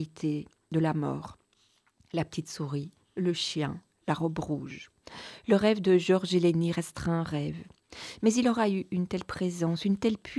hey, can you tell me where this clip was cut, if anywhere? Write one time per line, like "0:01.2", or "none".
none